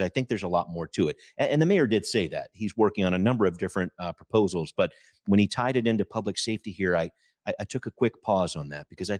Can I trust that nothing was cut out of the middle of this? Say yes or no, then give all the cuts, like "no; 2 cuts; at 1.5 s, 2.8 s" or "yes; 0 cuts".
yes; 0 cuts